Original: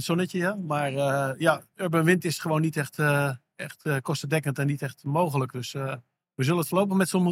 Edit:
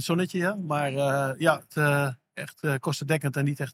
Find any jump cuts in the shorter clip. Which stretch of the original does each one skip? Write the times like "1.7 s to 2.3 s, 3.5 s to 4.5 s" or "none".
1.7 s to 2.9 s